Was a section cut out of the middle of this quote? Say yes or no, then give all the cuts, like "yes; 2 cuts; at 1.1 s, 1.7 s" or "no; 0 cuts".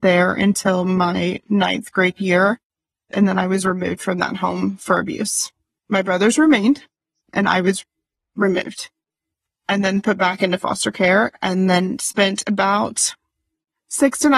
no; 0 cuts